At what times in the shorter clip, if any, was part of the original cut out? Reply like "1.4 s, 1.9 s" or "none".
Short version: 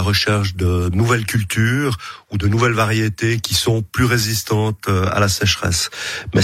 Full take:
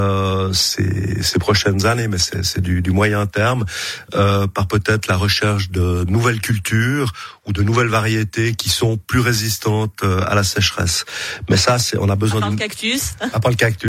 none